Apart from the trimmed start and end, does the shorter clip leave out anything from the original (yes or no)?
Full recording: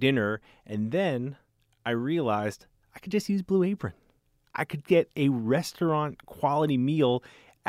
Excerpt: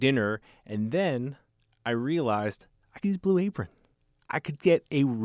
yes